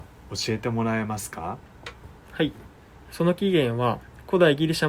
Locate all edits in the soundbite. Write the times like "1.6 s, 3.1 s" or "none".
none